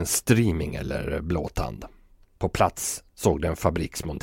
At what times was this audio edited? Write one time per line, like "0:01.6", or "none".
0:02.2